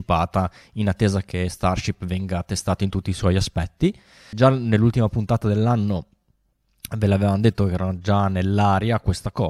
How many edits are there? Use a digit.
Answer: 1